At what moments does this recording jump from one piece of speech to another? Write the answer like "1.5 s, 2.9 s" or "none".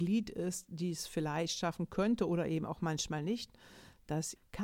none